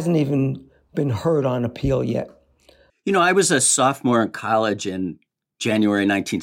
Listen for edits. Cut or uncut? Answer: cut